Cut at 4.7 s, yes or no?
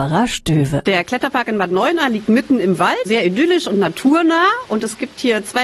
no